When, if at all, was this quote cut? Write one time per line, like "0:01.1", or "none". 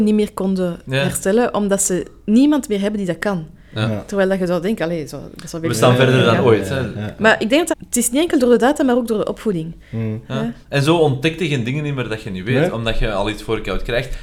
0:07.7
0:10.2